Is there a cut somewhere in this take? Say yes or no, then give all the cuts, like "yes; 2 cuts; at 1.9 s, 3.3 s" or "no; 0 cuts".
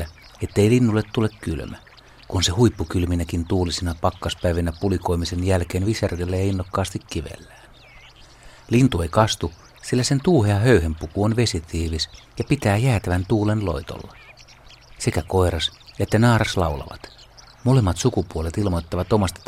yes; 1 cut; at 8.7 s